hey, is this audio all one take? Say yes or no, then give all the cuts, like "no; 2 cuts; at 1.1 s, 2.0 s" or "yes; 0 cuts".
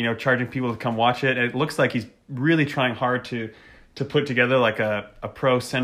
yes; 0 cuts